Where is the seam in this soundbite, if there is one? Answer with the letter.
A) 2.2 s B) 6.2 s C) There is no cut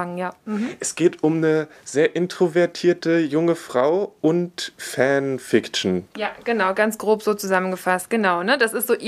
B